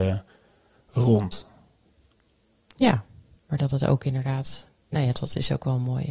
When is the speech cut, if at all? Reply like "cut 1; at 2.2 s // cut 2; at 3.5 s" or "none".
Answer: cut 1; at 3.4 s // cut 2; at 5.1 s